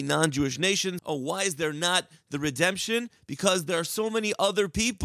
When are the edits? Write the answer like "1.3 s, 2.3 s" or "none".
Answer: 1.0 s